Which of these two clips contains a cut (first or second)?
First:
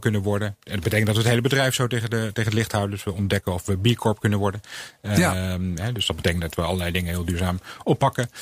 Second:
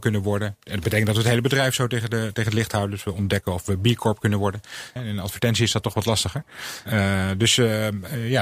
second